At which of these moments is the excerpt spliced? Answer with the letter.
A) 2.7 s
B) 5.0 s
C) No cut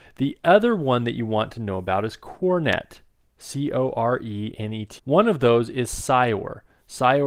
B